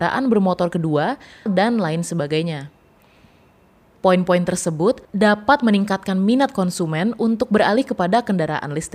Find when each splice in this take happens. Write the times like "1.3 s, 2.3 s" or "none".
1.5 s, 3.9 s, 5.0 s